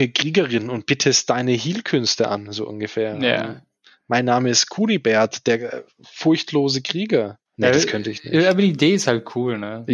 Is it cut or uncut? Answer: cut